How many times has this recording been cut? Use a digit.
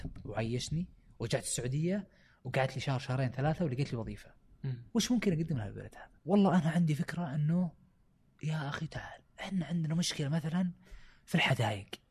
2